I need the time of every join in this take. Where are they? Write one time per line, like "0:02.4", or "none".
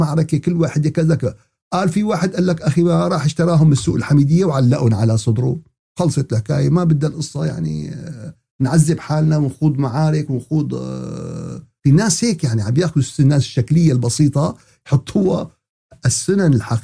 0:11.8